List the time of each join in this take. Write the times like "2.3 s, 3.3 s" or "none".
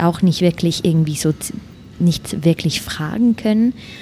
none